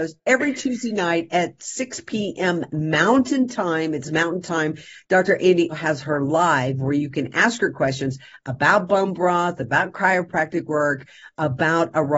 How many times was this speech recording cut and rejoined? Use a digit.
1